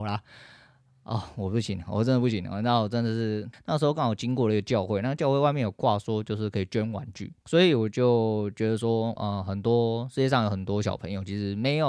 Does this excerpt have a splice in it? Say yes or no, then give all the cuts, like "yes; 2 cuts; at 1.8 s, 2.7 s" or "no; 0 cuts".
yes; 3 cuts; at 3.5 s, 7.4 s, 9.2 s